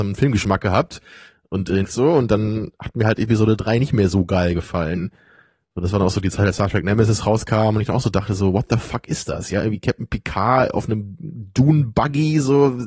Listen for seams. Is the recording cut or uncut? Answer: cut